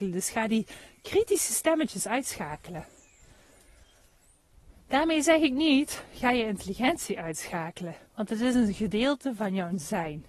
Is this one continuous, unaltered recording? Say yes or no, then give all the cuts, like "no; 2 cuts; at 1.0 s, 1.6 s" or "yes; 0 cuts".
no; 1 cut; at 8.1 s